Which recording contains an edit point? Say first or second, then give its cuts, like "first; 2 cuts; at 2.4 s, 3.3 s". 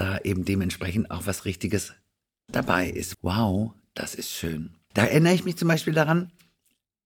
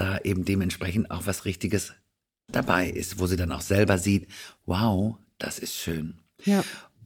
first; 2 cuts; at 3.1 s, 4.9 s